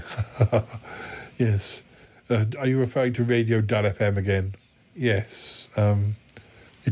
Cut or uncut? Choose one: uncut